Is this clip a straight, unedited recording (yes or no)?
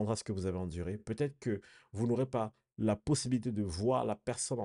yes